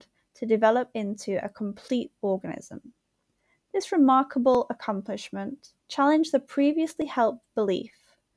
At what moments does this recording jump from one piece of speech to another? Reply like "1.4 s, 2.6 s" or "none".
3.6 s, 5.8 s